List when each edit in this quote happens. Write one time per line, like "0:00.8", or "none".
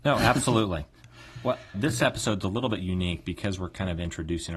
0:01.7